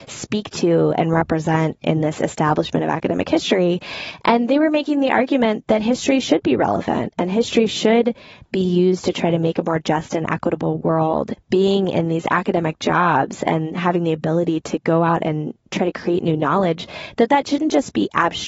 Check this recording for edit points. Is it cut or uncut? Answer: cut